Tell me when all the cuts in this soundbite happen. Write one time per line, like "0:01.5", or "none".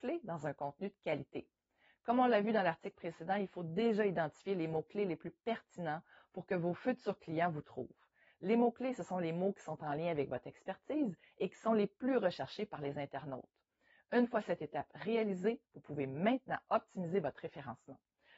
none